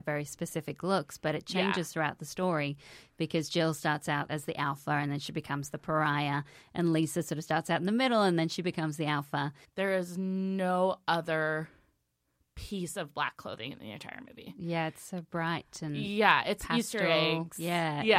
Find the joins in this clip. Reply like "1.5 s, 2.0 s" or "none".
9.7 s